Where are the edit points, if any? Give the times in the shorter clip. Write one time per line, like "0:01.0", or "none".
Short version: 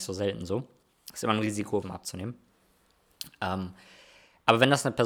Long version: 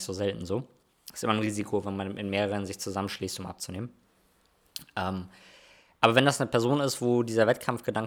0:01.8